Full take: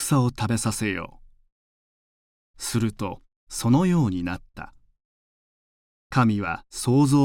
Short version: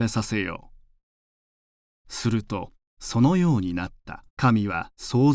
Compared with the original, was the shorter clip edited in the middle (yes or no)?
yes